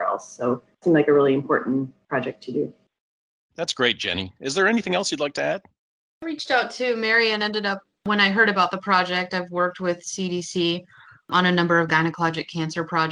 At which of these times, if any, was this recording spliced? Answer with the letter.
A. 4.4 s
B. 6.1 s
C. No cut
C